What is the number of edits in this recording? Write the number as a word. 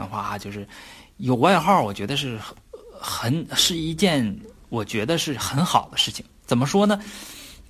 zero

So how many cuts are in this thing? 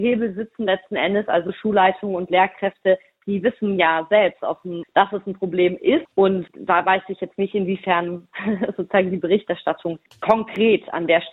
one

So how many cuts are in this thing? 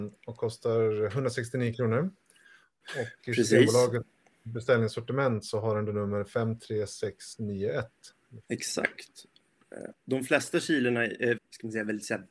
three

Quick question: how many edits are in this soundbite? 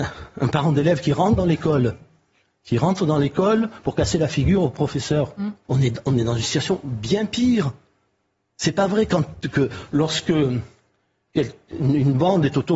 one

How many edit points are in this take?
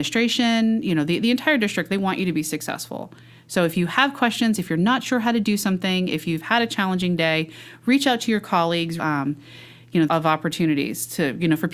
two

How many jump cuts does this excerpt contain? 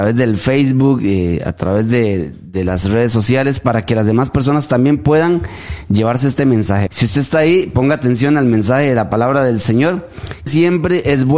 two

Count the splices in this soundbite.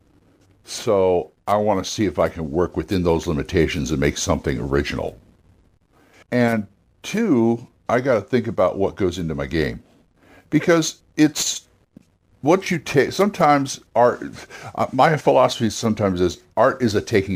one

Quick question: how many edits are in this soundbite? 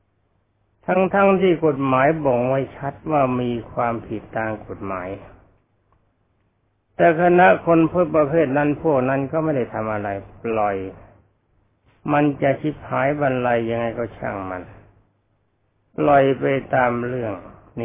zero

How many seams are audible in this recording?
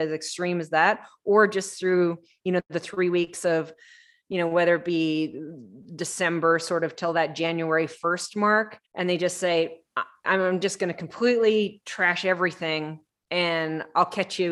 two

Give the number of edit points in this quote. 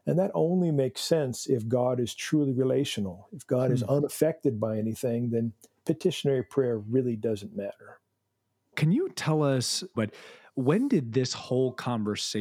two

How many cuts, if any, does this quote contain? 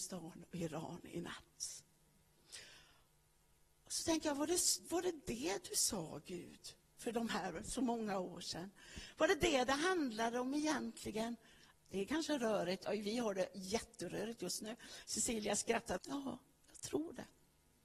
two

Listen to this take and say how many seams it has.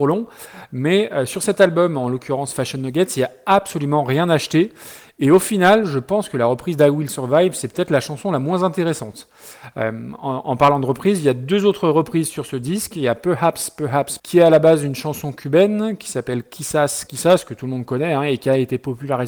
two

